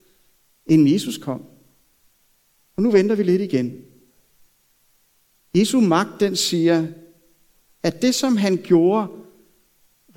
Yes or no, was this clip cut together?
no